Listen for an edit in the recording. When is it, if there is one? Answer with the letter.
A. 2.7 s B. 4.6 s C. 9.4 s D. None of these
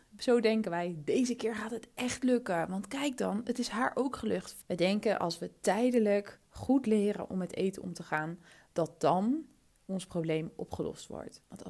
B